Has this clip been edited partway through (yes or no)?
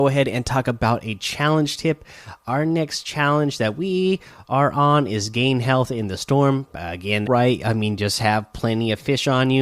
yes